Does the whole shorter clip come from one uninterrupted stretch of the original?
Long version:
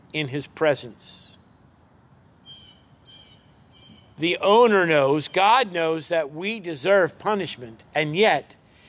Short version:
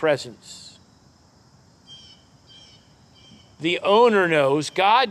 yes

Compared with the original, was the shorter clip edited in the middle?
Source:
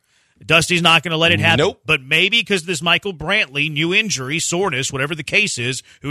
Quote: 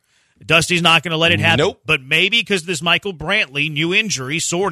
no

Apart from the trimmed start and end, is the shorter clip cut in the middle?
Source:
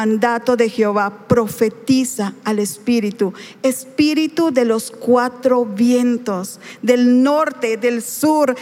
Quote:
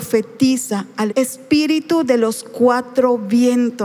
yes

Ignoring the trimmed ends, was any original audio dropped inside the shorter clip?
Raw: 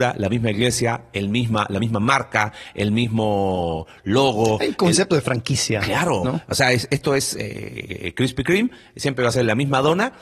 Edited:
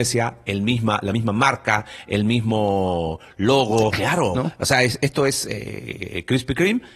yes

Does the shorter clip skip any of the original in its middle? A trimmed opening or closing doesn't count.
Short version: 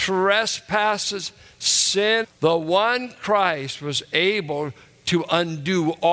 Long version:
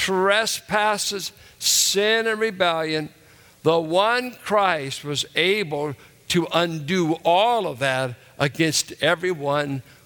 yes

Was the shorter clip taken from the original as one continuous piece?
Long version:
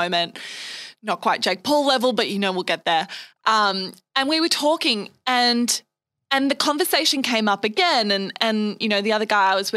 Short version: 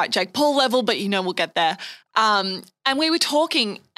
yes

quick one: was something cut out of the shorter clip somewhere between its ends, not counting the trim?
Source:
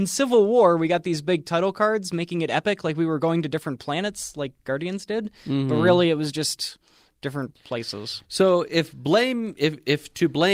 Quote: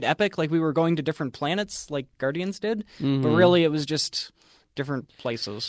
no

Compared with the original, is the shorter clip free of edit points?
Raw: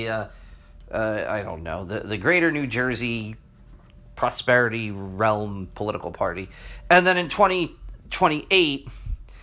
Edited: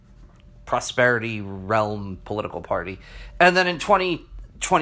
yes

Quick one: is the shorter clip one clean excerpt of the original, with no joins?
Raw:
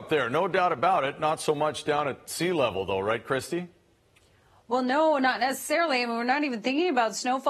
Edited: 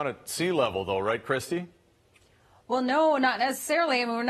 yes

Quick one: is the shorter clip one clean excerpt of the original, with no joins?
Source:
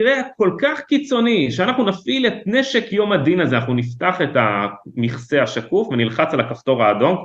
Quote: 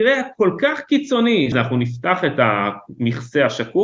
no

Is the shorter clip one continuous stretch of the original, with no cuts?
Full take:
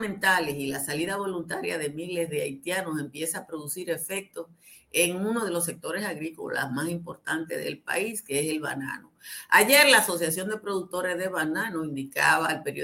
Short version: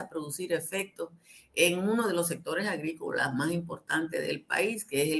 yes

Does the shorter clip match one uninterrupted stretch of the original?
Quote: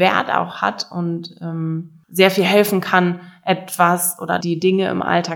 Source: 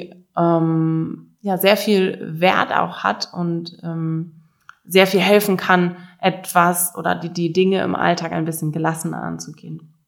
no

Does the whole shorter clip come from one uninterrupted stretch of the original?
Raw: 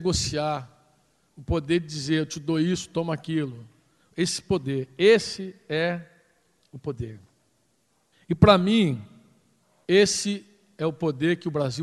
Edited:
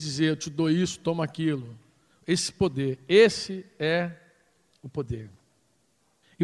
yes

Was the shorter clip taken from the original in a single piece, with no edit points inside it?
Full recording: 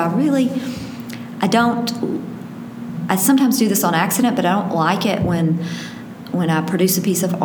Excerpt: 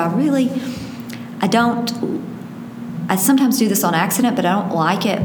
yes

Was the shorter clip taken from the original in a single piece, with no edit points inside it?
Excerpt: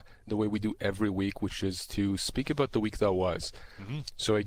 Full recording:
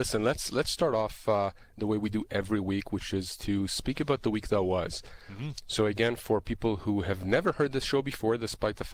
yes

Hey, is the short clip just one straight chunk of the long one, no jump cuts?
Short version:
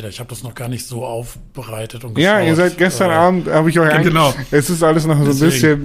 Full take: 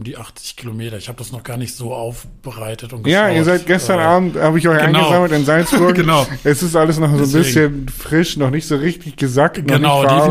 no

